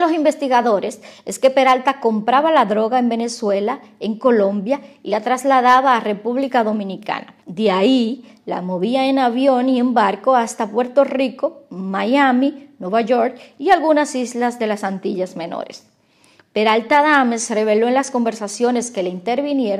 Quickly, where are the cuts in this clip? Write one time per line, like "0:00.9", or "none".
0:07.4